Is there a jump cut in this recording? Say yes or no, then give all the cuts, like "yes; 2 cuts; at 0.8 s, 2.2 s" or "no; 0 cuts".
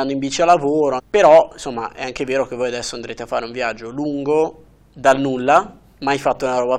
yes; 1 cut; at 1.0 s